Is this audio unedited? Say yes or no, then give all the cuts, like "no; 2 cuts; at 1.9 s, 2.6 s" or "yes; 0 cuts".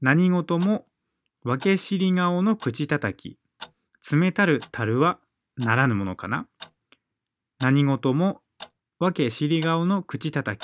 yes; 0 cuts